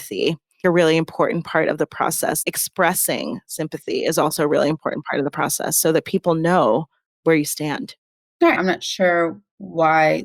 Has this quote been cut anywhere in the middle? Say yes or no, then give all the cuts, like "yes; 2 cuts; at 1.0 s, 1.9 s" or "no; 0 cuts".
yes; 1 cut; at 8.5 s